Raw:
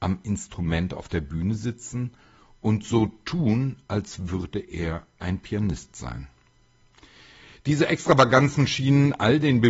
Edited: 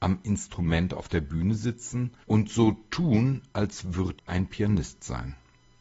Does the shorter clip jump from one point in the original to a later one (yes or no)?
yes